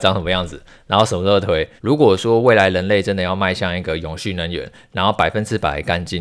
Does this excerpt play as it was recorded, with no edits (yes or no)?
no